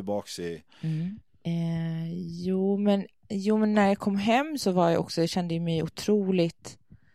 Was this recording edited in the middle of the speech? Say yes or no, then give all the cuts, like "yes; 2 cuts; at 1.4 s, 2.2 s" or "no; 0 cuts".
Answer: yes; 1 cut; at 1.3 s